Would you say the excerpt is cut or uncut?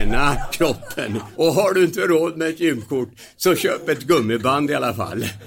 cut